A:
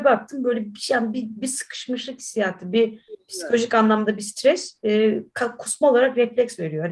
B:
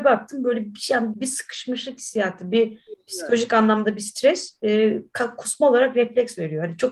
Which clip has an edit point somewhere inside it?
B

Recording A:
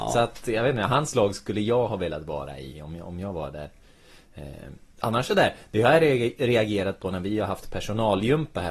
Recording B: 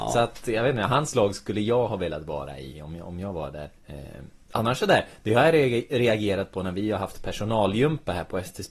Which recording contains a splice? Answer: B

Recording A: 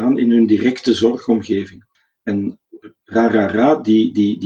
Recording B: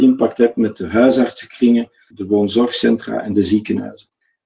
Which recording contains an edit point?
B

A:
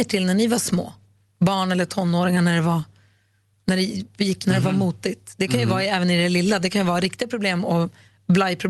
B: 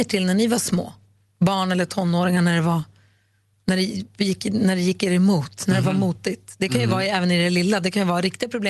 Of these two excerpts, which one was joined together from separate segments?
A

